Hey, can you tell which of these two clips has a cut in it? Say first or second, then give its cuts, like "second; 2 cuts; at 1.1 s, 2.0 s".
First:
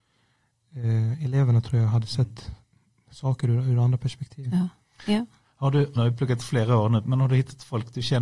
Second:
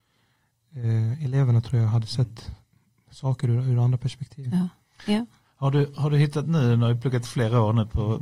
first; 2 cuts; at 6.0 s, 7.0 s